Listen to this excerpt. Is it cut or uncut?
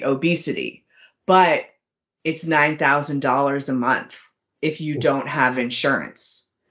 uncut